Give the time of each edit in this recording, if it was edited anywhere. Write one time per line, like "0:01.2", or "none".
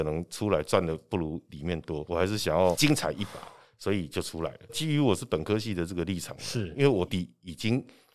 0:04.7
0:07.1